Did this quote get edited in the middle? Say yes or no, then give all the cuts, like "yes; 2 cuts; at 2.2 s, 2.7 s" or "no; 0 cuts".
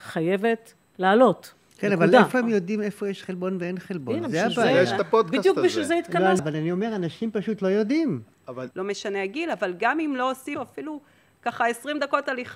yes; 3 cuts; at 6.4 s, 8.7 s, 10.5 s